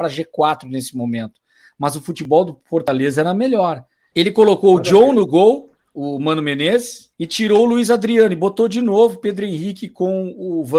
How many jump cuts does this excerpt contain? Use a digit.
2